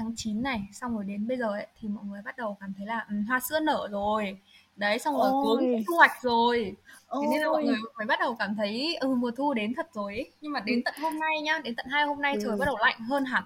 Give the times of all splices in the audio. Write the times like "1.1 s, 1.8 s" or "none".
none